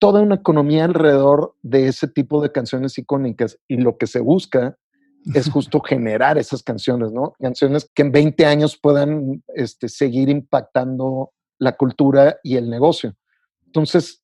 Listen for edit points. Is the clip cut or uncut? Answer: cut